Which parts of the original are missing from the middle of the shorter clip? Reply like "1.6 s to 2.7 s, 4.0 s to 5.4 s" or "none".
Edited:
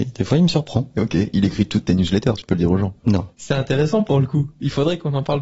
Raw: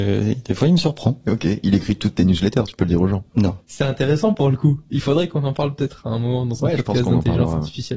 none